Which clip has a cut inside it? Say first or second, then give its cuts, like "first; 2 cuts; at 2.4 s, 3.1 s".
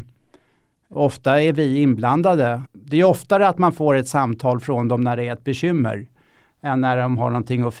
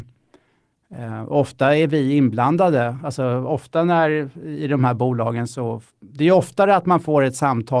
first; 2 cuts; at 0.9 s, 2.6 s